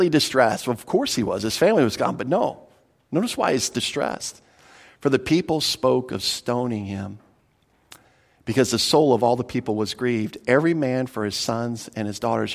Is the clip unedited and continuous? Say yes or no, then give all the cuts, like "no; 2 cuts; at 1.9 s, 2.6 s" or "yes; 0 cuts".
yes; 0 cuts